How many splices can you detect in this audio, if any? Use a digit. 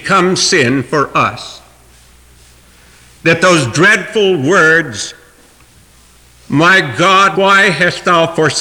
1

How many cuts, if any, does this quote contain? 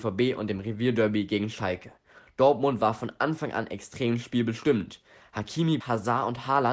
1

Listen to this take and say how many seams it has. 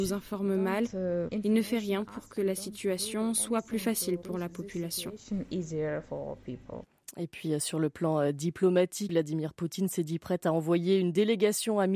1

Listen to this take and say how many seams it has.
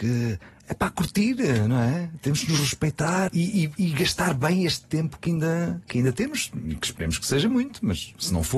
1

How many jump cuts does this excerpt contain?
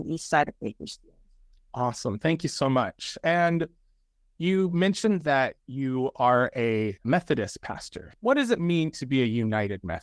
0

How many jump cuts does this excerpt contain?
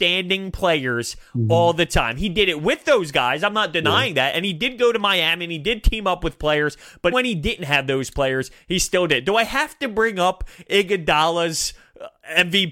1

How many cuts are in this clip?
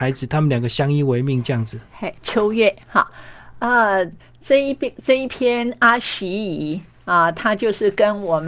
0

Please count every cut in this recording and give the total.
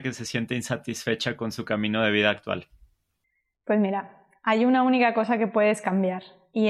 0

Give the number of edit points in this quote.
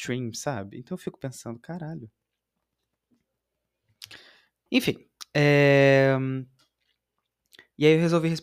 1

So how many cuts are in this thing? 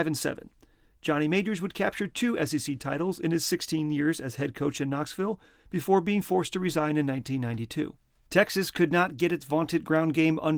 1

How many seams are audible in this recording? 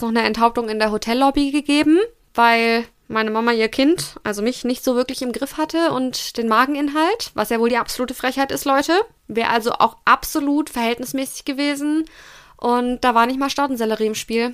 0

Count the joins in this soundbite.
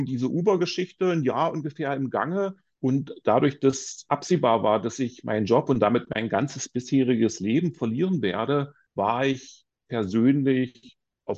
1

